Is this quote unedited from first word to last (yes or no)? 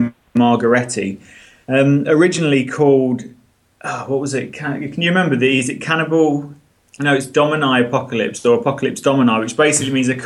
yes